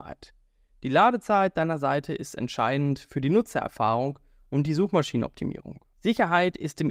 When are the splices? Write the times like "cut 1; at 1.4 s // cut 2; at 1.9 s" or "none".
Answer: cut 1; at 5.9 s